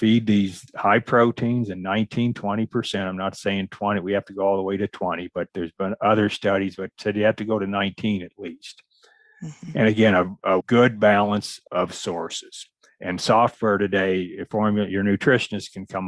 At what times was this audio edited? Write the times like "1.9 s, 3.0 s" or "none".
10.6 s